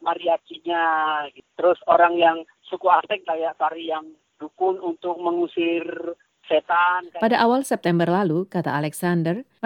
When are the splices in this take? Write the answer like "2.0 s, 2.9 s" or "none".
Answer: 3.2 s